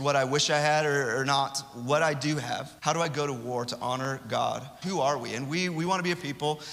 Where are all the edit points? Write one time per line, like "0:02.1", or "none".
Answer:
0:02.8
0:04.8